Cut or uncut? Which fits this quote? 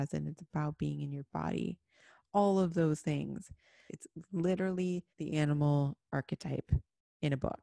cut